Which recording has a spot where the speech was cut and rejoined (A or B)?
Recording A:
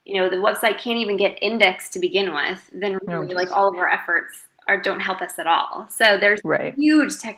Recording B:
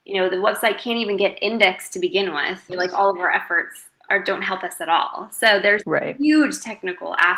B